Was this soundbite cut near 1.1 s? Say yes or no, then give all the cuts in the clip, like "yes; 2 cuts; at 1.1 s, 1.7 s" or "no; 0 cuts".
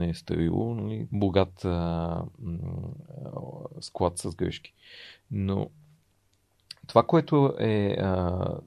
yes; 1 cut; at 1.1 s